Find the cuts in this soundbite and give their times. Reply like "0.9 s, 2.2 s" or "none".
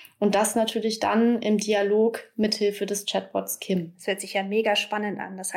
none